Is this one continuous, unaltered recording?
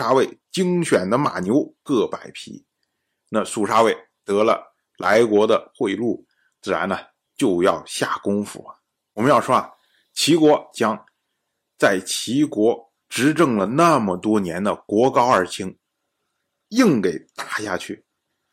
no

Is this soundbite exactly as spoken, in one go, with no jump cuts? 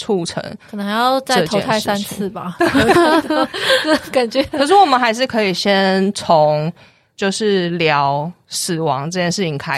yes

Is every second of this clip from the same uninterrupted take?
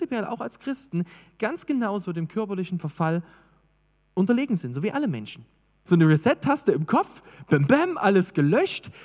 no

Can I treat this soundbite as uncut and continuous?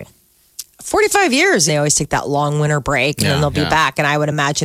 no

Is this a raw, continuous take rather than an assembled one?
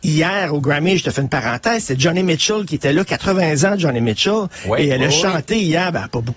yes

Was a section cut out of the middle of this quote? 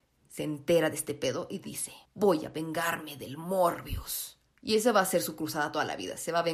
yes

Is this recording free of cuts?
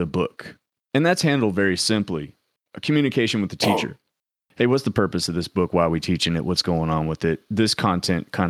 yes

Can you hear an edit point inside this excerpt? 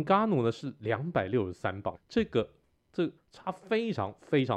yes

